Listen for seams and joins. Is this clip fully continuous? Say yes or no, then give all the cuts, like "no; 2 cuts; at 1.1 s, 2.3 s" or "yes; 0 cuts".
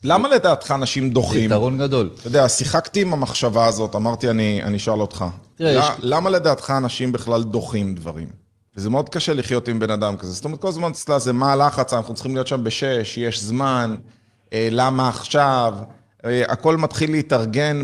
no; 1 cut; at 8.7 s